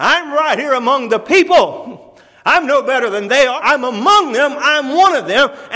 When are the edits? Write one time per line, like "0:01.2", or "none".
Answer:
0:03.6